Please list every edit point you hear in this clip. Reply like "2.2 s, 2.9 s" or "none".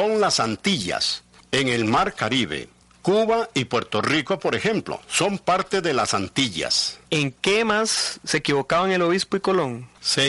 7.1 s